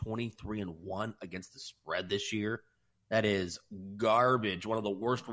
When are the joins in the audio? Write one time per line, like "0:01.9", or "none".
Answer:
none